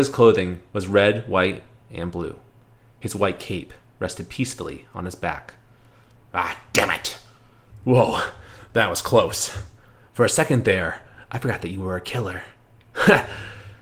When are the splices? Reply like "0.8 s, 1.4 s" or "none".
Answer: none